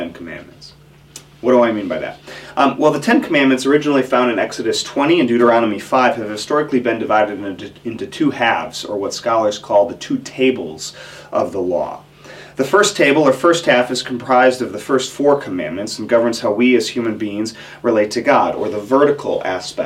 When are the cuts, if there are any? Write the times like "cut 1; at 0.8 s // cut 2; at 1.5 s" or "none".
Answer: none